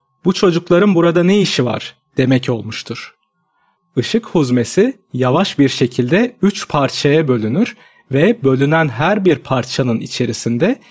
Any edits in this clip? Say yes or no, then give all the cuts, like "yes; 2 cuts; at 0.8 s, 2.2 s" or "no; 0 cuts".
yes; 1 cut; at 3.8 s